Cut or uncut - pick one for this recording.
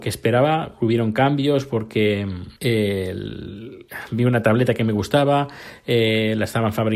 cut